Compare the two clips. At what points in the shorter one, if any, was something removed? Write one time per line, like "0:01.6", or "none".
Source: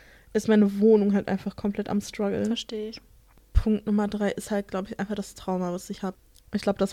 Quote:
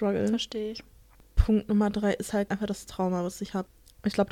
0:02.5